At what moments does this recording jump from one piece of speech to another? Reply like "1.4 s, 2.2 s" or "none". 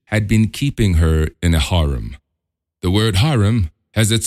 none